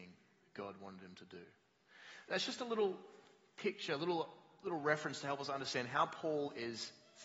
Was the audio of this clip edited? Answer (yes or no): no